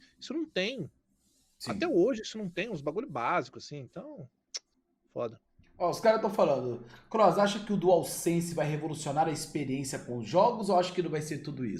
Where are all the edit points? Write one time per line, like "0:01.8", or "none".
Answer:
none